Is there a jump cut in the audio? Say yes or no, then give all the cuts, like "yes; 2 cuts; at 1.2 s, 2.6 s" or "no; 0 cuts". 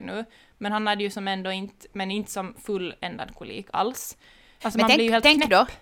yes; 2 cuts; at 1.9 s, 4.6 s